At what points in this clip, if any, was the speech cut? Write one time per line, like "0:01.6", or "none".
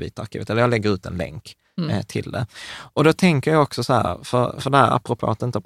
none